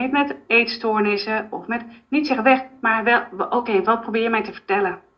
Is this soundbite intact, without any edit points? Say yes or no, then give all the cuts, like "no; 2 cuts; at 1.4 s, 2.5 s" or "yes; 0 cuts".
yes; 0 cuts